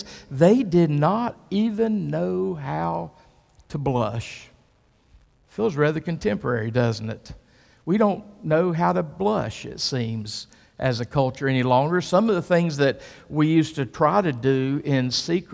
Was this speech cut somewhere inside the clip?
no; 0 cuts

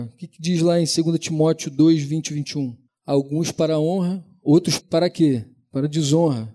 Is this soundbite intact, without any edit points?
no; 2 cuts; at 2.9 s, 4.8 s

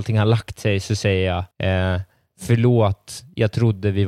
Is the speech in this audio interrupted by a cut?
yes; 1 cut; at 1.5 s

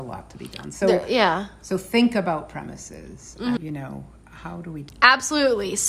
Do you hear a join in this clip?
yes; 2 cuts; at 3.6 s, 4.9 s

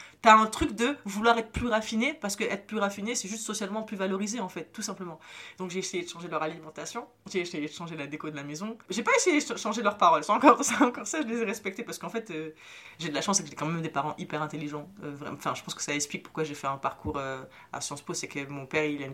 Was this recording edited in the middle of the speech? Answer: no; 0 cuts

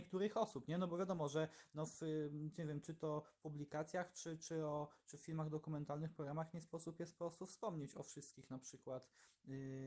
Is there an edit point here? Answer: no; 0 cuts

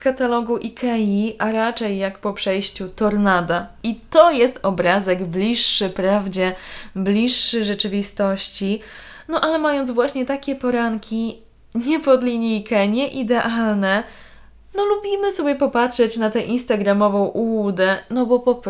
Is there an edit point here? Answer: no; 0 cuts

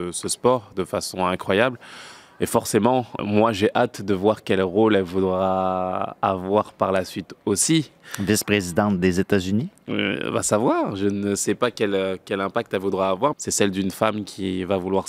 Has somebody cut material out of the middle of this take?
yes; 2 cuts; at 3.2 s, 13.3 s

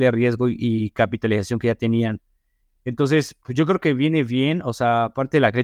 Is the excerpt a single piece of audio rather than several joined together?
yes; 0 cuts

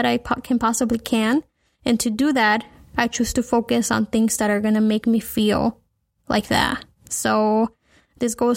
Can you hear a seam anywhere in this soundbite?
no; 0 cuts

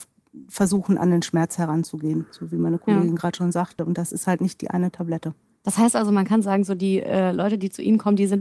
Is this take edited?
no; 0 cuts

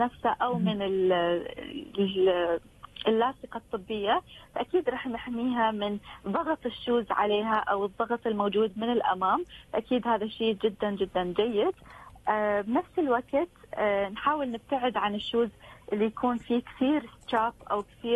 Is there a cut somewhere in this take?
no; 0 cuts

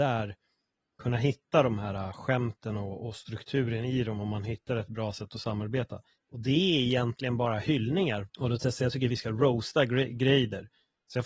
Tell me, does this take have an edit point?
yes; 2 cuts; at 6.1 s, 8.2 s

